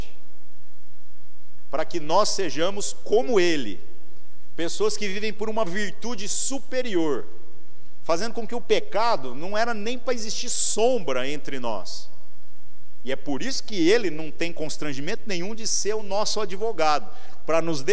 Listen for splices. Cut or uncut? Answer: uncut